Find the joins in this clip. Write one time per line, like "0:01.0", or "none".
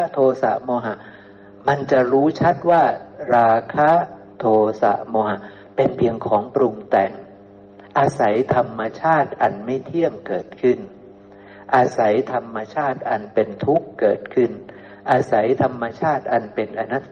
none